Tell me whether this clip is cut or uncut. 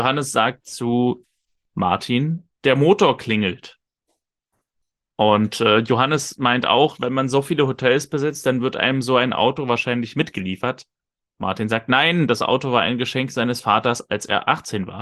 uncut